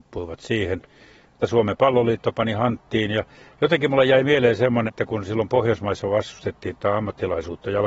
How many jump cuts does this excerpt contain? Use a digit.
2